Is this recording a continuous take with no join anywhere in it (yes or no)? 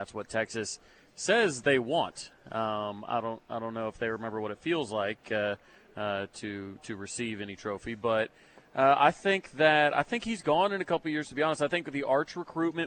yes